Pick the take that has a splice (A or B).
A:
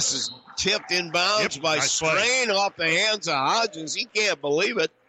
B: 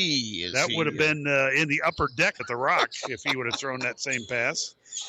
B